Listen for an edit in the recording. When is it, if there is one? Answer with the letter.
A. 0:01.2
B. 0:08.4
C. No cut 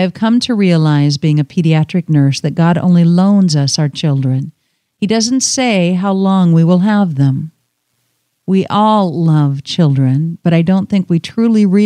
C